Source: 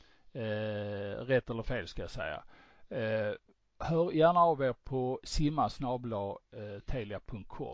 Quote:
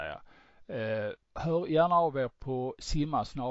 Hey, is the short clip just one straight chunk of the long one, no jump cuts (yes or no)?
no